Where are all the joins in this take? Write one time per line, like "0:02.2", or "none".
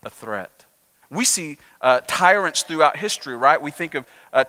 0:01.0